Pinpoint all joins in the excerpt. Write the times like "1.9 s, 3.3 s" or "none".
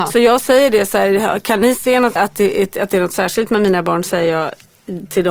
2.2 s